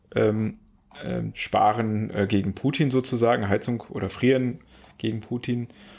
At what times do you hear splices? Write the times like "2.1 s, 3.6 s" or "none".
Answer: 1.3 s